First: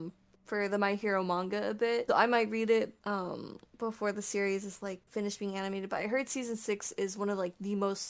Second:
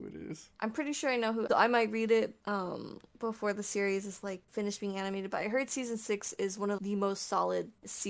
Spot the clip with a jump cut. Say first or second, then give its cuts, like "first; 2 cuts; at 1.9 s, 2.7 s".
second; 2 cuts; at 1.5 s, 6.8 s